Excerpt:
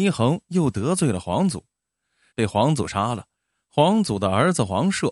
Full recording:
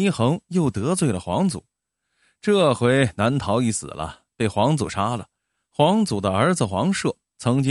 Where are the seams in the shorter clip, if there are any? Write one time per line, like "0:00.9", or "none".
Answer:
0:02.3